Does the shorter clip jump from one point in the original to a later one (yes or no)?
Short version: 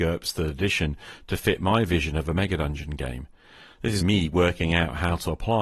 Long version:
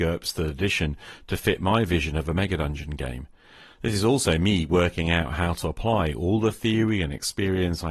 yes